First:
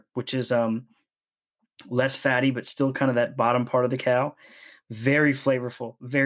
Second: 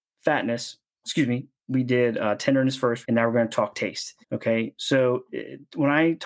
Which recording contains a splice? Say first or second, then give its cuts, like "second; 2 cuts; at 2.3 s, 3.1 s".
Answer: second; 2 cuts; at 3.0 s, 4.2 s